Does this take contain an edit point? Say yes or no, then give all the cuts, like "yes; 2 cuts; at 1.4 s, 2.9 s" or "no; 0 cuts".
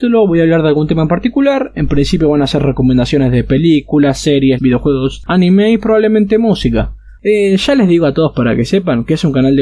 yes; 2 cuts; at 4.6 s, 7.2 s